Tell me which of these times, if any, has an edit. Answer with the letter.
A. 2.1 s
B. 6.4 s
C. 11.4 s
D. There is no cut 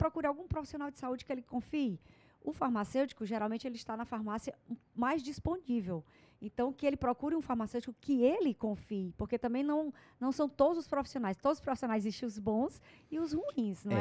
D